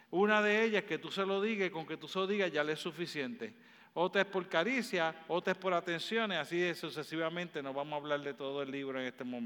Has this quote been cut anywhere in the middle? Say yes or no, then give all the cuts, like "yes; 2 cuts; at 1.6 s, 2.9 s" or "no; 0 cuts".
no; 0 cuts